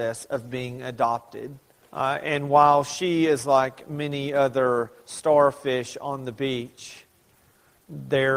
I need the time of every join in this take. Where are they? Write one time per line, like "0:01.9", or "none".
0:01.8